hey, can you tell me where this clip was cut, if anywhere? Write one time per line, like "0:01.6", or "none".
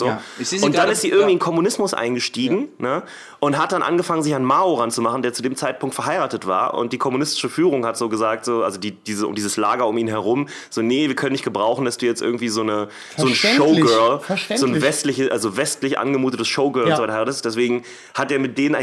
none